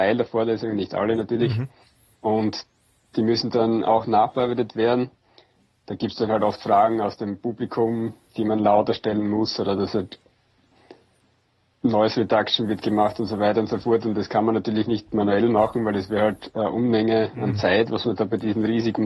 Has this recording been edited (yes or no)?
no